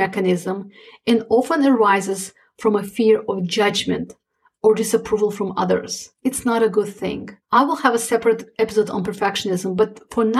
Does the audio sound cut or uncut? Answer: cut